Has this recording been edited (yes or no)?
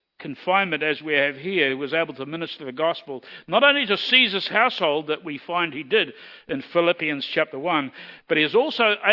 no